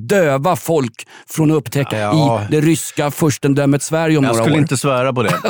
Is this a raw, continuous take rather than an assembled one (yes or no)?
no